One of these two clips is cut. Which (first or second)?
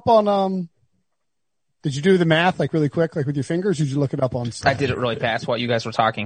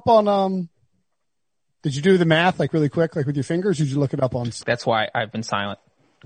second